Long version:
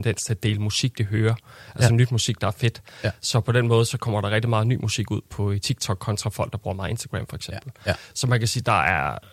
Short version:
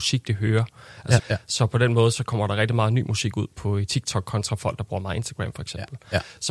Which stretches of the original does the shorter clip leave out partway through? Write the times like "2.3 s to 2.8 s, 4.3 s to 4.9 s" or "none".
1.9 s to 2.9 s